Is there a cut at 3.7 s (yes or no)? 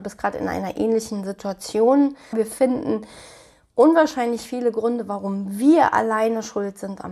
no